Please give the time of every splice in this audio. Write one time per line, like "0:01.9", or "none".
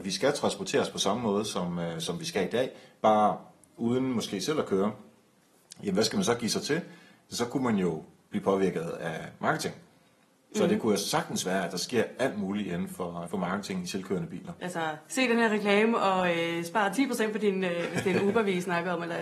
0:13.3
0:14.6